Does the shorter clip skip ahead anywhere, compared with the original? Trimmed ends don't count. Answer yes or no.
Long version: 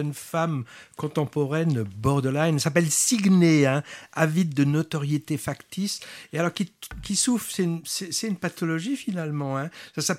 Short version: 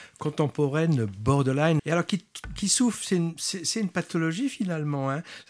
yes